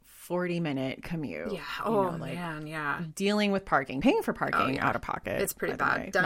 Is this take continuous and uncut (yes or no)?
yes